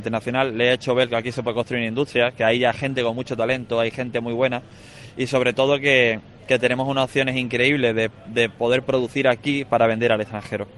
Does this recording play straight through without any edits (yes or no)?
yes